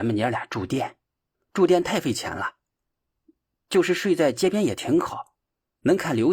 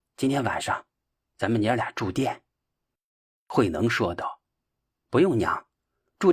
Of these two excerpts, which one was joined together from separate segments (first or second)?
first